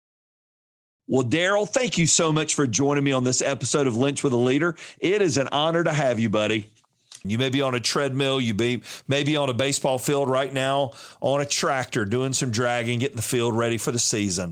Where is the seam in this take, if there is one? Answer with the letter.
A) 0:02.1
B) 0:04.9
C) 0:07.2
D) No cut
C